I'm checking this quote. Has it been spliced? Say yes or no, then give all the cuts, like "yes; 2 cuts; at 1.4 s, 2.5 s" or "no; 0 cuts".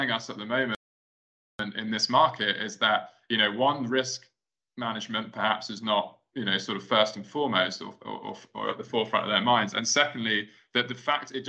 no; 0 cuts